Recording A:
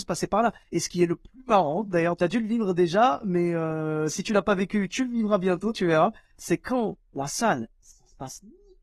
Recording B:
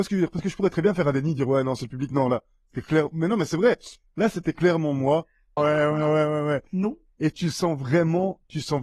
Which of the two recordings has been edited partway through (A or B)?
B